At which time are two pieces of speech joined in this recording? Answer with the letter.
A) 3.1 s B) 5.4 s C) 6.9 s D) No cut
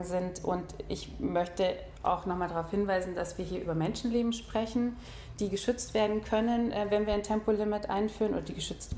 D